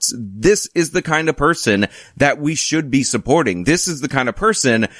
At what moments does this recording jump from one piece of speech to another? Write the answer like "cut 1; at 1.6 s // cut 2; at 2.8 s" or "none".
cut 1; at 3.6 s